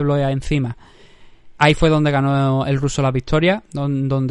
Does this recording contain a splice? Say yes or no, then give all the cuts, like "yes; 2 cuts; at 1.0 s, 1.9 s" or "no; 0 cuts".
yes; 1 cut; at 1.5 s